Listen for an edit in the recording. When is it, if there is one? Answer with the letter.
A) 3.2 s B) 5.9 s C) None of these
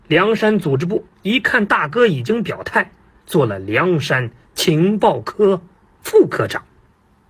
A